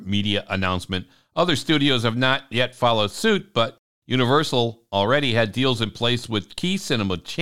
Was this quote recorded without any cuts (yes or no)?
yes